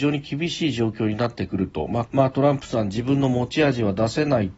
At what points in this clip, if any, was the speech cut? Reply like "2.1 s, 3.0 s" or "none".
2.1 s